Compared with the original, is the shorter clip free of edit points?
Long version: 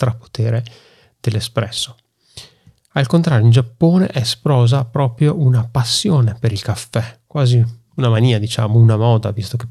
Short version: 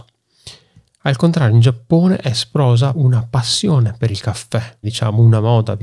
no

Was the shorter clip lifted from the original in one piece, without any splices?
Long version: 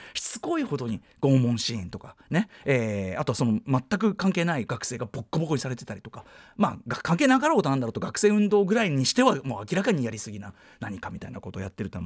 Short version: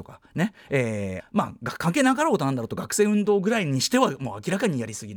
no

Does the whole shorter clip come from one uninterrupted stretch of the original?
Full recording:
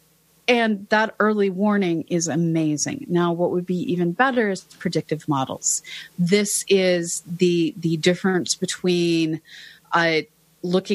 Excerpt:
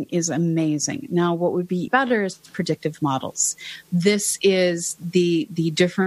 no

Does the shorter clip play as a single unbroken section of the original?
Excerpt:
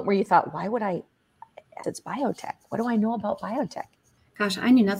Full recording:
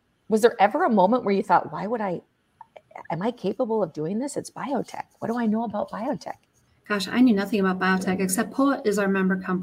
no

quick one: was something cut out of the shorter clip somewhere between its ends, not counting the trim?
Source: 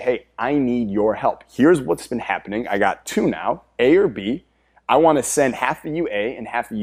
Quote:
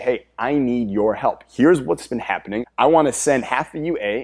yes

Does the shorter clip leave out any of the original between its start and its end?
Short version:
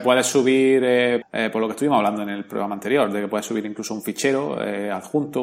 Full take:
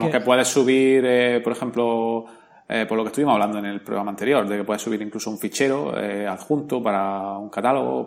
yes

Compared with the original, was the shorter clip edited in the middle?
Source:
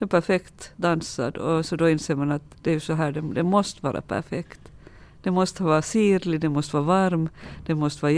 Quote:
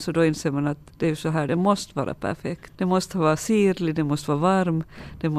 yes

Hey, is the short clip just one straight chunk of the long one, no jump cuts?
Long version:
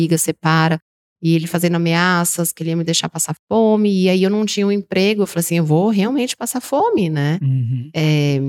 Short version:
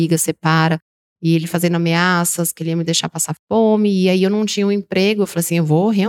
yes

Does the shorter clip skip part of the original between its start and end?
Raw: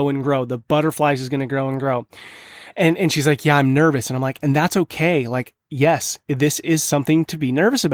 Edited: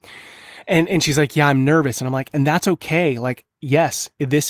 no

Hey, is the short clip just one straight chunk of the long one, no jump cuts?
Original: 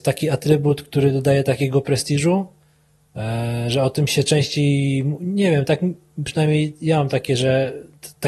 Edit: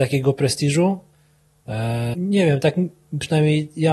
no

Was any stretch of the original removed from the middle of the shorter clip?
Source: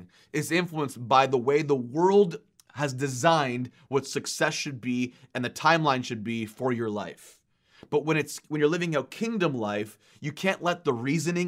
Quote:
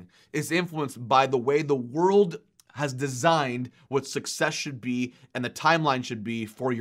no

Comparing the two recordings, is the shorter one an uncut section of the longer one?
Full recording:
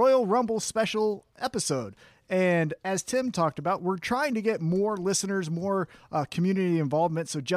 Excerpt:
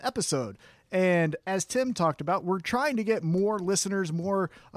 yes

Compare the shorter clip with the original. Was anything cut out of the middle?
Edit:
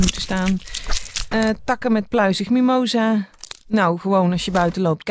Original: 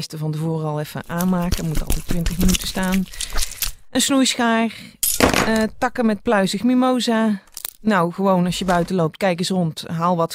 yes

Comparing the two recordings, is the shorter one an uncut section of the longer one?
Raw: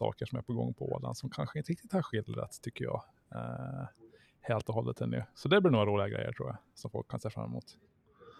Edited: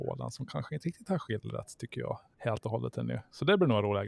no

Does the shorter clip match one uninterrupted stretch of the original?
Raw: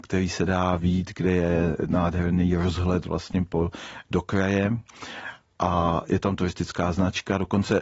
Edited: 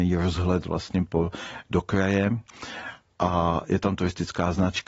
yes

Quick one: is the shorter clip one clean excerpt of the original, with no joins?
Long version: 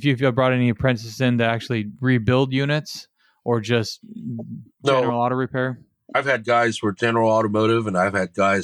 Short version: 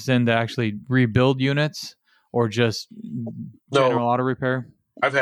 yes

